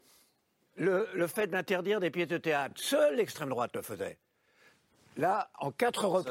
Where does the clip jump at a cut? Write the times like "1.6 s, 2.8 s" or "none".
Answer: none